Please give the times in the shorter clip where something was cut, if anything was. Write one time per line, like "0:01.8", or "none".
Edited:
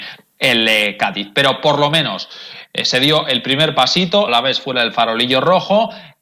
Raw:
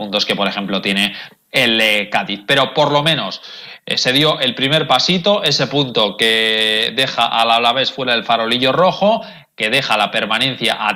0:04.3